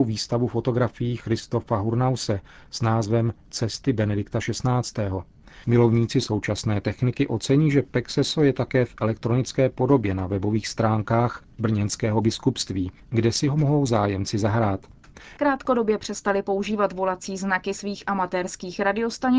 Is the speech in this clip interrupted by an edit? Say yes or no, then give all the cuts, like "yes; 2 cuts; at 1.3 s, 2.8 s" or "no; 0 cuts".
yes; 2 cuts; at 5.6 s, 15.4 s